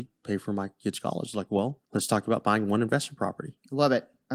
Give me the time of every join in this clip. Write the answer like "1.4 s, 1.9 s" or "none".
1.9 s